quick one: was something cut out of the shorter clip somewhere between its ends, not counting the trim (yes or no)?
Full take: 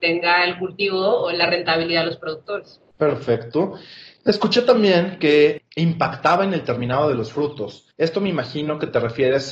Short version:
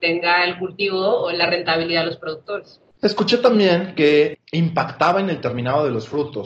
yes